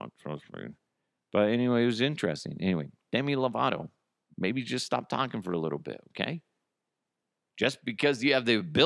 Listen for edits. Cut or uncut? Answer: uncut